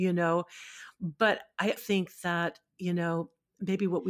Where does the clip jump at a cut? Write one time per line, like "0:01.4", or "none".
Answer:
0:01.8